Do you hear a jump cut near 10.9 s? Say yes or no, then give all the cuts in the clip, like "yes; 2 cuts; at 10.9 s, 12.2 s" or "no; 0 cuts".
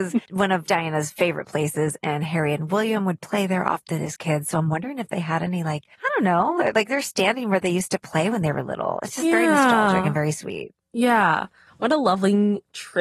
no; 1 cut; at 5.9 s